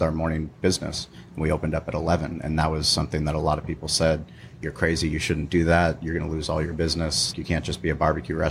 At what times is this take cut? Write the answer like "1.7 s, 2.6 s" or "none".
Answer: 7.3 s